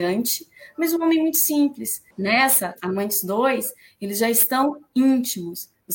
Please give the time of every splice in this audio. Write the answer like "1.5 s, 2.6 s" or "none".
2.1 s